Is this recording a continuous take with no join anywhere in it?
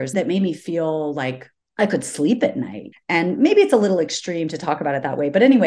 yes; 0 cuts

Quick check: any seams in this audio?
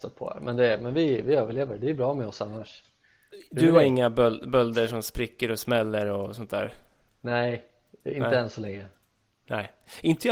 no; 0 cuts

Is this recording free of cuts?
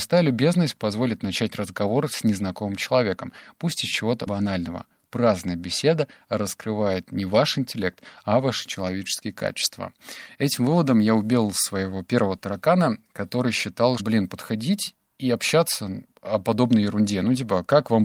no; 3 cuts; at 4.3 s, 14.0 s, 16.1 s

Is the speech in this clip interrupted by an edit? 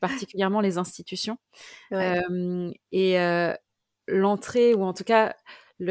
no; 0 cuts

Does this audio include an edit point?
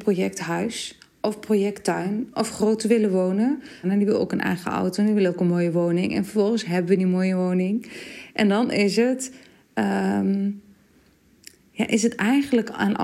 yes; 1 cut; at 3.8 s

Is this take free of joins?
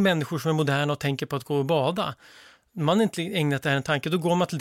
yes; 0 cuts

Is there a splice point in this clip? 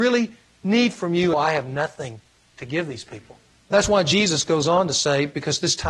yes; 2 cuts; at 1.3 s, 3.6 s

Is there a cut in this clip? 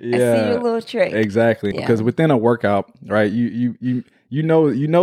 yes; 1 cut; at 1.7 s

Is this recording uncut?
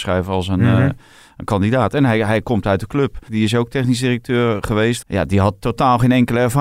no; 2 cuts; at 3.3 s, 5.0 s

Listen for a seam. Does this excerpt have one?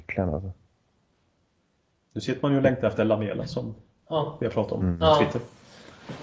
no; 0 cuts

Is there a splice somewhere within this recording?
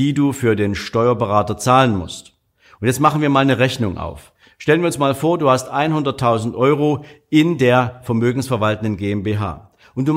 no; 0 cuts

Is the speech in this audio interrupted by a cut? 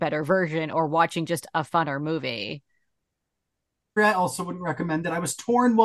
yes; 1 cut; at 4.0 s

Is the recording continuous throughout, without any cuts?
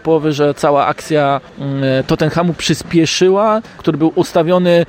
no; 2 cuts; at 1.5 s, 3.8 s

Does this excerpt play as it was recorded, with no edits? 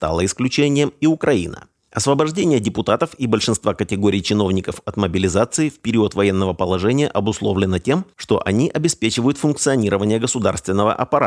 yes; 0 cuts

